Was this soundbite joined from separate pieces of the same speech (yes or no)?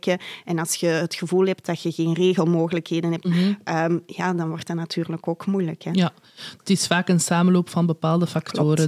yes